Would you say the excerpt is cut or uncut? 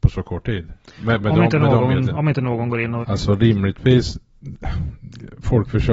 cut